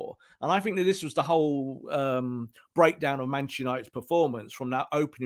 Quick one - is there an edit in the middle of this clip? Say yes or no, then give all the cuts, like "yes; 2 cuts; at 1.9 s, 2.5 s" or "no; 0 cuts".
no; 0 cuts